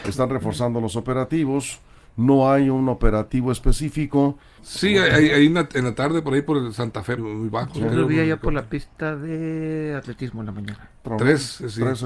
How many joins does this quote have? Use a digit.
3